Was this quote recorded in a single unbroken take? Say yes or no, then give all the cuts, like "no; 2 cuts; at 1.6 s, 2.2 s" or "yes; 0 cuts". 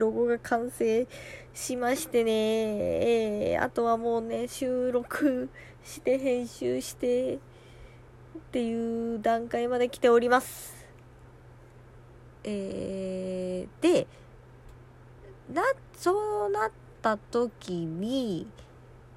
yes; 0 cuts